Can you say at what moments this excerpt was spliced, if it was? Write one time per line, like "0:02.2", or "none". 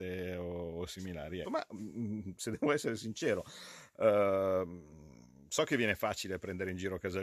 0:01.4